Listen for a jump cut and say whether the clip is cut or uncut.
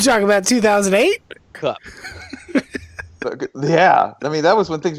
cut